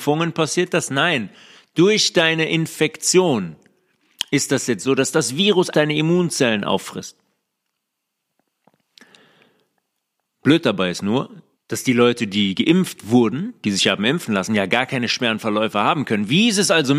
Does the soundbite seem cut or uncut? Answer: cut